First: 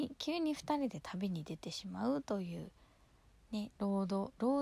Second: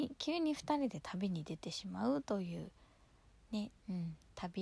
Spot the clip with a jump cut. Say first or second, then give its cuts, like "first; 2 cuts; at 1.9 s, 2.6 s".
second; 1 cut; at 3.7 s